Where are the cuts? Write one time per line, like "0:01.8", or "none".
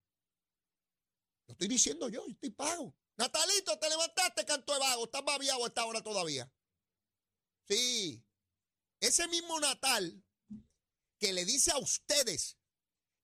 none